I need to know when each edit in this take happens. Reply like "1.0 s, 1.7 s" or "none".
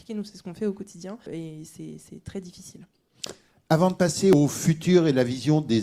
1.3 s